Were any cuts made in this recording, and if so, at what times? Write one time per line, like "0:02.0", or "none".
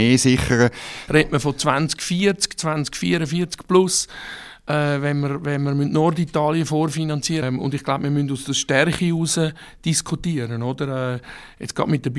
0:01.1
0:07.4